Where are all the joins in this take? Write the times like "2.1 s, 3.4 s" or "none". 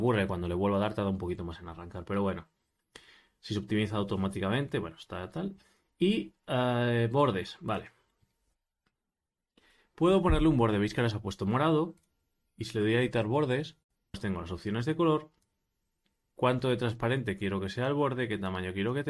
none